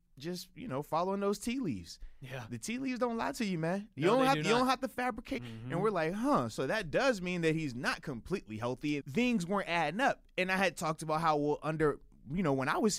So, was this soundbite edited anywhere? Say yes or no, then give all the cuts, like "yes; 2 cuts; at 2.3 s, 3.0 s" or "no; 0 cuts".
yes; 2 cuts; at 5.4 s, 9.0 s